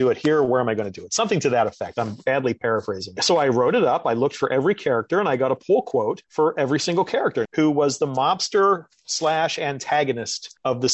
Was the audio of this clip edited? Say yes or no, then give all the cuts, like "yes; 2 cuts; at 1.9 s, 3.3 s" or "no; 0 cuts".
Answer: yes; 1 cut; at 7.5 s